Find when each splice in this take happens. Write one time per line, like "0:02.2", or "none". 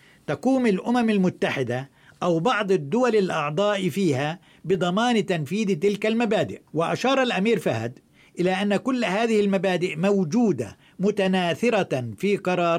0:06.7